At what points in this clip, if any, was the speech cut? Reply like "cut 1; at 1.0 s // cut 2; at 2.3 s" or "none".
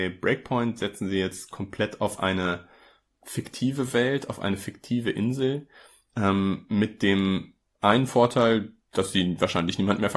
none